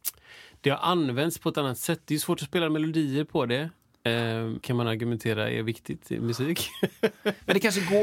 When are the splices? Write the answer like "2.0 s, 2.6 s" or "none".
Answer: 4.6 s